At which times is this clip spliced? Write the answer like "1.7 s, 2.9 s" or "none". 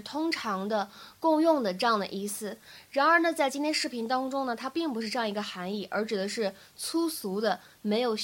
none